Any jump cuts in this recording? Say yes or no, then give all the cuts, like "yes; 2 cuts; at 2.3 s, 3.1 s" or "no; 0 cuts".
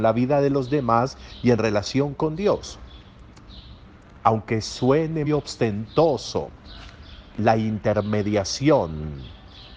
yes; 2 cuts; at 5.3 s, 7.3 s